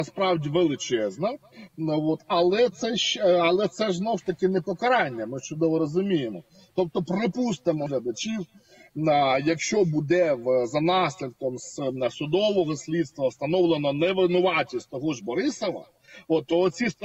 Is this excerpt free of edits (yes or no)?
no